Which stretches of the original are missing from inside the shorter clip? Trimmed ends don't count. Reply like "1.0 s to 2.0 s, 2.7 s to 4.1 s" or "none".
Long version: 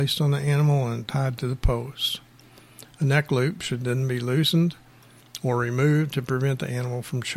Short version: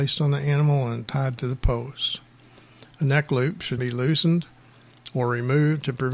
3.8 s to 4.1 s